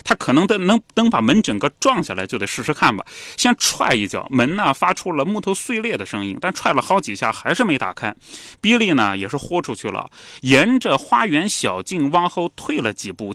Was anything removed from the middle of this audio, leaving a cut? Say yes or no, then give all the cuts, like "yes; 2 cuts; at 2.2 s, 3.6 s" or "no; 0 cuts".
no; 0 cuts